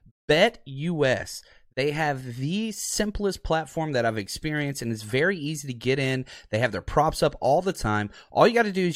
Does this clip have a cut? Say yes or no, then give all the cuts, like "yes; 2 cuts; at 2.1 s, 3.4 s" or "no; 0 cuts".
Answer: no; 0 cuts